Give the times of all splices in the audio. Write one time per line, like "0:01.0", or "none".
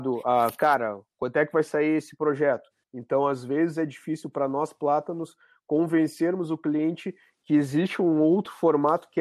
0:02.8